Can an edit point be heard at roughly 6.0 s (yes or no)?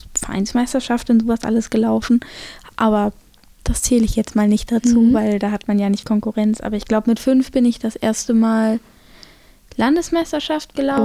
yes